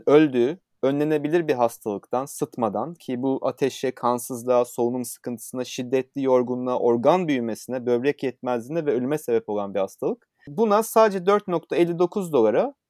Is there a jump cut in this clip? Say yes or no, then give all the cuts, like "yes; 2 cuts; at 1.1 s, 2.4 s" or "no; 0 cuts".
no; 0 cuts